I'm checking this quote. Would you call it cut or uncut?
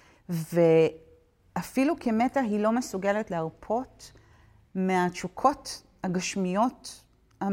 uncut